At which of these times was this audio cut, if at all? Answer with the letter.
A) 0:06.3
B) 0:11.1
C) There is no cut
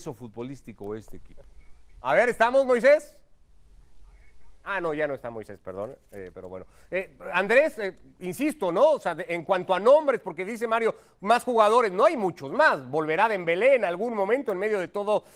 A